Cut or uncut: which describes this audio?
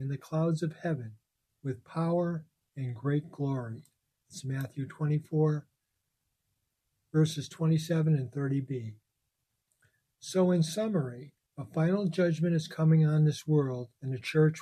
uncut